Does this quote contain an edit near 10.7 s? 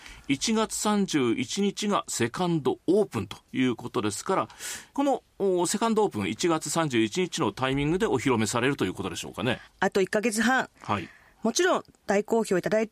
yes; 2 cuts; at 9.7 s, 10.7 s

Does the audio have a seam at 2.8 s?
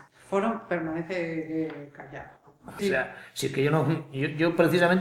yes; 1 cut; at 2.8 s

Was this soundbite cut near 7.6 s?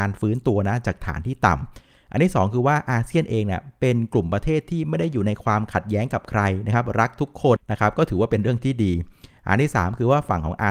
yes; 1 cut; at 7.6 s

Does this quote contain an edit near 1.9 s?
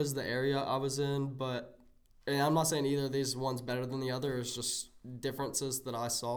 no; 0 cuts

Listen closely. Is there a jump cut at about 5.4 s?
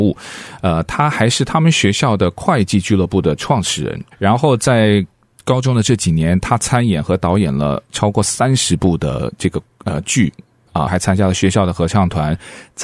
no; 2 cuts; at 4.1 s, 10.9 s

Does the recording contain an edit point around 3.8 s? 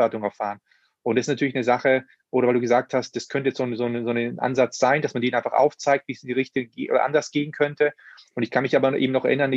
no; 0 cuts

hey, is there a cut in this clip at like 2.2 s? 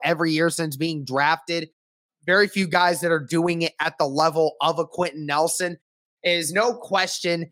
no; 1 cut; at 6.0 s

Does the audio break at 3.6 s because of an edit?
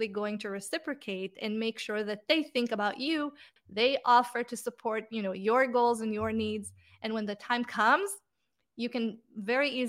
yes; 1 cut; at 3.6 s

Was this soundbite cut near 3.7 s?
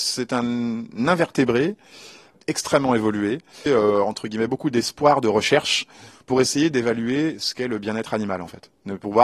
yes; 1 cut; at 3.7 s

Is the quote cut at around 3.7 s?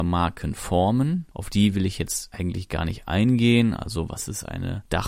no; 0 cuts

